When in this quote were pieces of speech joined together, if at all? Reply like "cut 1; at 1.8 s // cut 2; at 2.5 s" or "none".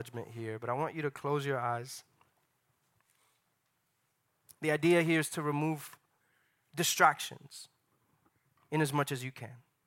none